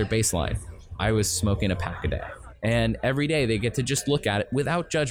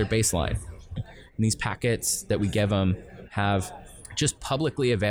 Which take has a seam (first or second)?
second